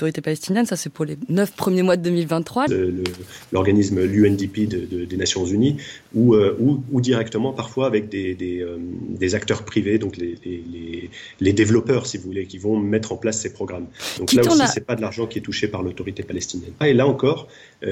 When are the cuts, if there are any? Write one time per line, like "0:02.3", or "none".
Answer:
0:02.7
0:16.8